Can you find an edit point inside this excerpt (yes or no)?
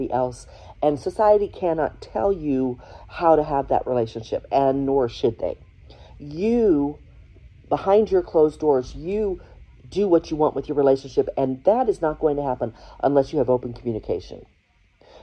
no